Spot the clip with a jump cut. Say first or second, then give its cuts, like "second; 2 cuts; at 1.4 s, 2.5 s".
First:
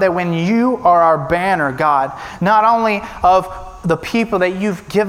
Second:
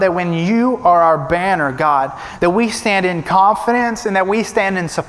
first; 1 cut; at 2.4 s